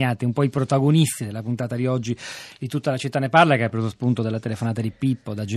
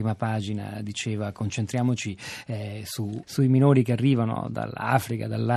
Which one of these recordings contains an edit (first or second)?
second